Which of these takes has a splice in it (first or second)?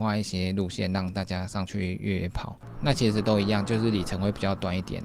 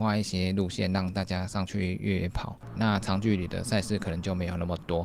second